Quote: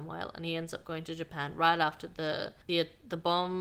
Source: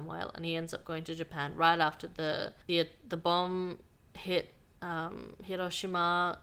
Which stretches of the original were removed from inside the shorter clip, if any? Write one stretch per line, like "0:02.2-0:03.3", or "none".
none